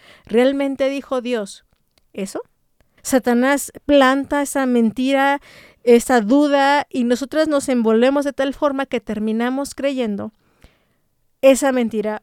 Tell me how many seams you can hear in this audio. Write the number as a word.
one